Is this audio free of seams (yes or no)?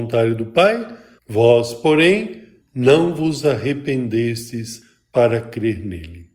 no